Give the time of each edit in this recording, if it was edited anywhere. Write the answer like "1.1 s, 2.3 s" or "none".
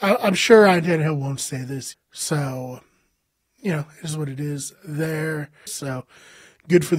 1.9 s, 5.7 s